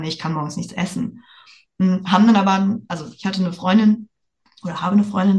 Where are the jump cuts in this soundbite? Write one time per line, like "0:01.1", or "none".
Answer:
none